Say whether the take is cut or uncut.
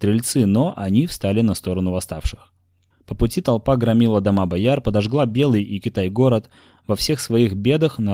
cut